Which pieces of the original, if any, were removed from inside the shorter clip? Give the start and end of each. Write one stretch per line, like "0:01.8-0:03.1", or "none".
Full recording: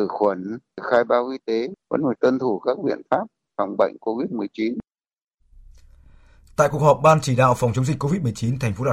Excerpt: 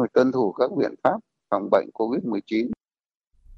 none